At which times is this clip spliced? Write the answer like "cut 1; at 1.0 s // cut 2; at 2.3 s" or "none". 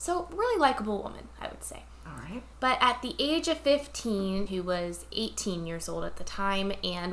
cut 1; at 4.5 s